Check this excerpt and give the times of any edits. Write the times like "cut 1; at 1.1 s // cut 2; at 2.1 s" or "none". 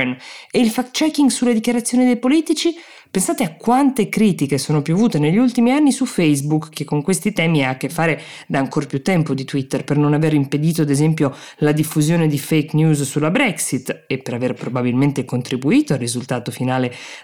none